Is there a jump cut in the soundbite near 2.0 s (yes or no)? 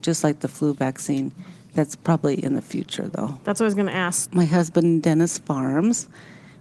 no